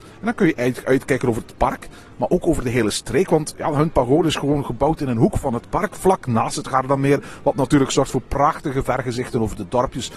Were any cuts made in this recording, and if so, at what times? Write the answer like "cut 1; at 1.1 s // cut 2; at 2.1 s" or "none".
none